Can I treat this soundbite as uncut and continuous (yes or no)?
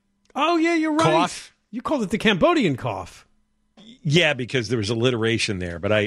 yes